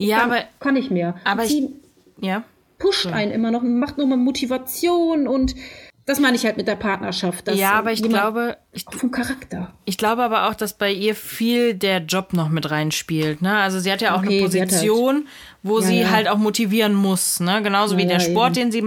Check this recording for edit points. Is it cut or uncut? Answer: uncut